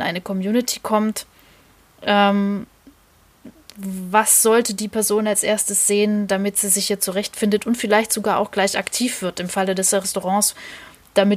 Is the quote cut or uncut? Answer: uncut